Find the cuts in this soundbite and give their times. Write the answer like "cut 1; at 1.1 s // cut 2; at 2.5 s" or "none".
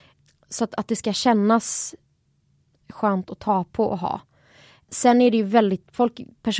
none